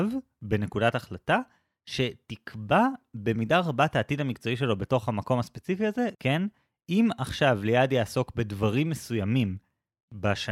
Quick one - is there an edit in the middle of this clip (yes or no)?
yes